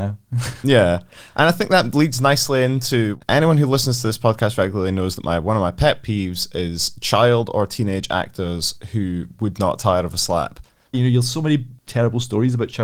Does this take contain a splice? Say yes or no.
yes